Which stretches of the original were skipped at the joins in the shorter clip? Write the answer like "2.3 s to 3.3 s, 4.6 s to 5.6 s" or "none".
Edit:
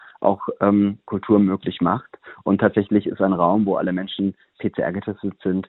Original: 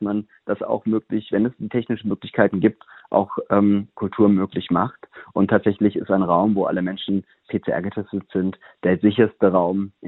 none